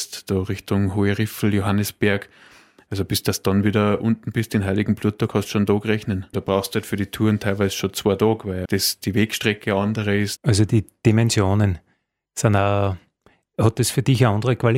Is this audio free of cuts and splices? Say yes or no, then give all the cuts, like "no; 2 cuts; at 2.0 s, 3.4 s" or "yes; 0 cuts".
no; 3 cuts; at 6.3 s, 8.7 s, 10.4 s